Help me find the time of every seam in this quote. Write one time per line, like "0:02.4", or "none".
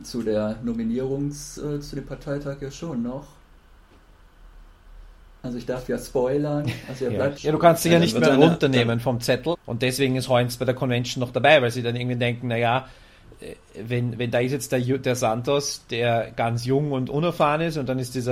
0:07.4
0:09.5